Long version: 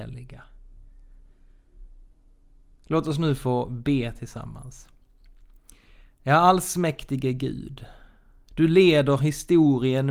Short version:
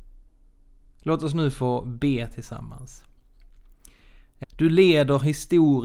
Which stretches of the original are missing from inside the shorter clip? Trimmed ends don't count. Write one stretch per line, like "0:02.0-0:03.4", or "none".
0:06.3-0:08.4